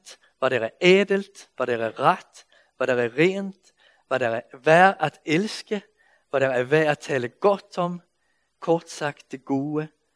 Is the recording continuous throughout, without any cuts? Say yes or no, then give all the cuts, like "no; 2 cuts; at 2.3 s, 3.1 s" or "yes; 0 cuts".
yes; 0 cuts